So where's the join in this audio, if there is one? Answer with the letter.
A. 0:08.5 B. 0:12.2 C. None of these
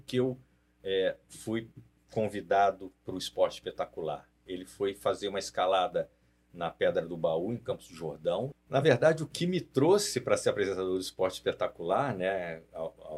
A